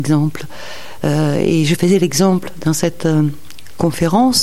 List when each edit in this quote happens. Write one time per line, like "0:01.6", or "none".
none